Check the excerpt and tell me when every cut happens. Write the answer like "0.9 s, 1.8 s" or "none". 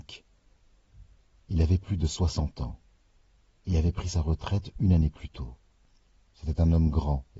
none